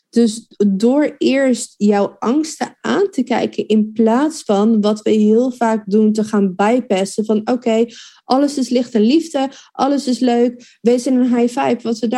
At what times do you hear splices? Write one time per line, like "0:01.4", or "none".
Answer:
none